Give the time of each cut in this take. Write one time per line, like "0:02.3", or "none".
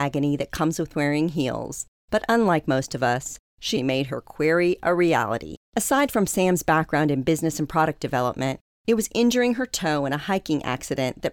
0:03.8